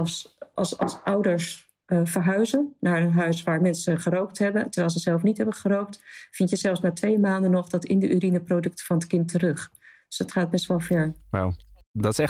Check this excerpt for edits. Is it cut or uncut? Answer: uncut